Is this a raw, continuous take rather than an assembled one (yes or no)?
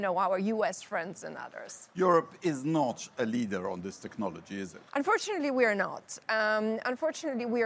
no